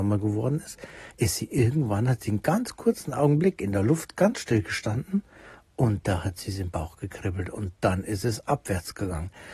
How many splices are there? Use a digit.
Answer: 0